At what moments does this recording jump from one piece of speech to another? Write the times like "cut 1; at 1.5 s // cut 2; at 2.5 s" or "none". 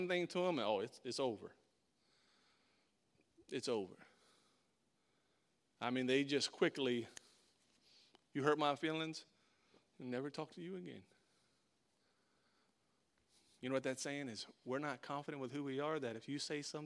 none